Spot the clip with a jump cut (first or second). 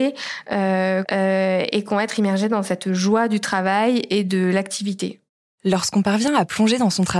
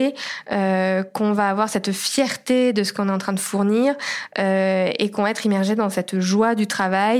first